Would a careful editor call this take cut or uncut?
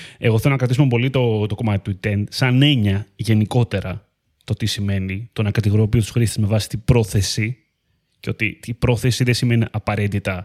uncut